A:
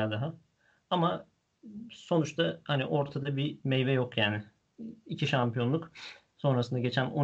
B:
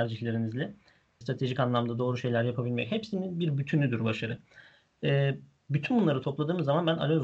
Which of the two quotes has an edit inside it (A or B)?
B